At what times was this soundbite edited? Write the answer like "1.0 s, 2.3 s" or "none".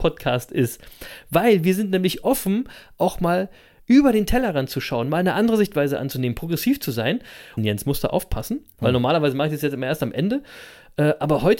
7.6 s